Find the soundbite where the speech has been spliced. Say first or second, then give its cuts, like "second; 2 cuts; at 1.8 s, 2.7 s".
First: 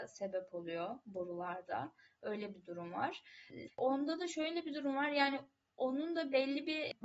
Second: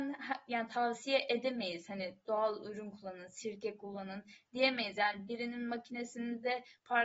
first; 1 cut; at 3.7 s